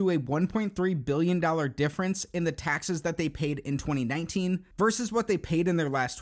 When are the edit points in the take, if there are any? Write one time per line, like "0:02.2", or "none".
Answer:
none